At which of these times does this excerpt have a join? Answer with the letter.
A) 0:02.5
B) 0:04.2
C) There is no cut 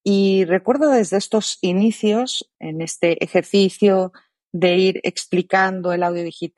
A